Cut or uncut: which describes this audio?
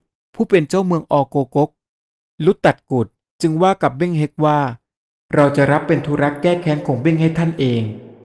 uncut